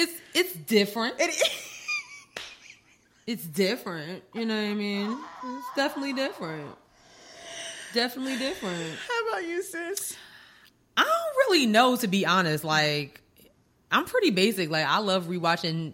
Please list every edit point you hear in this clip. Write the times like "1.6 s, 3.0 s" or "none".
none